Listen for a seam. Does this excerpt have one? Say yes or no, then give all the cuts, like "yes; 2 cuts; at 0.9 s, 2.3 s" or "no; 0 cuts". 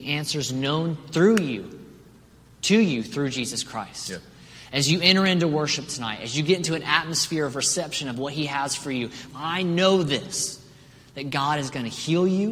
yes; 1 cut; at 9.3 s